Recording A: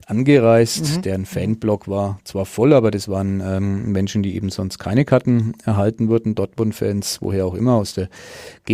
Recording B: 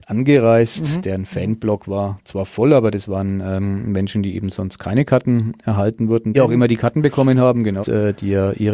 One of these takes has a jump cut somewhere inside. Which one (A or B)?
B